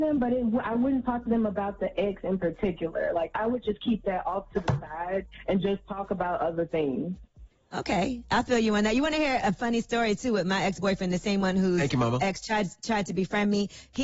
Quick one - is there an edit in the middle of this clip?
no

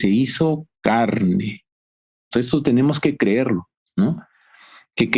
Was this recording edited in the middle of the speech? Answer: yes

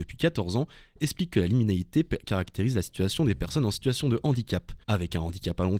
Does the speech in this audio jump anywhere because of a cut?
yes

